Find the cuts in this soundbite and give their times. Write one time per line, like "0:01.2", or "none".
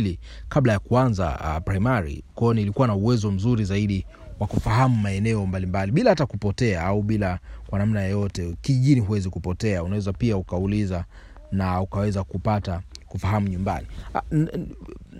none